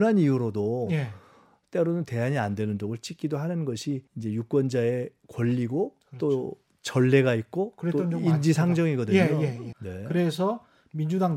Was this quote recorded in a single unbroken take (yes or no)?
no